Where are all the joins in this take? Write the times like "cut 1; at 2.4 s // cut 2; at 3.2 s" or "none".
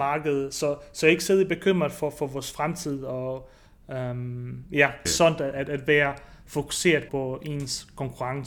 cut 1; at 5.1 s // cut 2; at 7.1 s